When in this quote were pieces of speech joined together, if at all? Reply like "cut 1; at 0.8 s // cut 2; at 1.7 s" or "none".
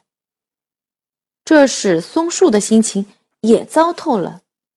none